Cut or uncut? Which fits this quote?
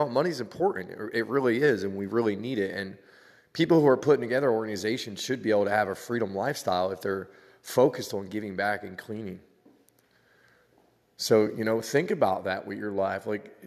uncut